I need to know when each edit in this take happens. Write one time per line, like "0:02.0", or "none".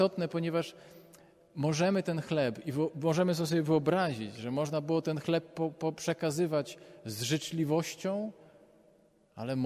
none